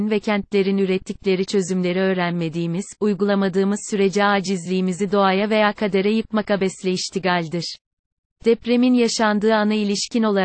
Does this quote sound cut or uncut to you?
uncut